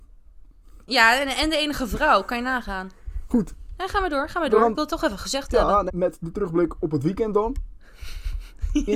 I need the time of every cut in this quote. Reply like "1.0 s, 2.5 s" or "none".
5.9 s